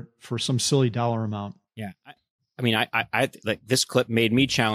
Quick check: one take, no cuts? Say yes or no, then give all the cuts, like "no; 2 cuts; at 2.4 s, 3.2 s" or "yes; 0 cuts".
yes; 0 cuts